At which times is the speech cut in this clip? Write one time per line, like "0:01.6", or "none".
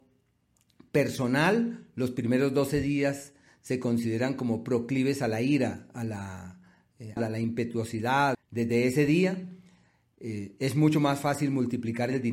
0:07.2
0:08.3